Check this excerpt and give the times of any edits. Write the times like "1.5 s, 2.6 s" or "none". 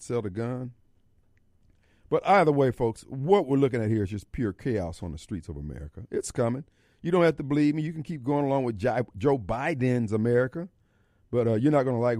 none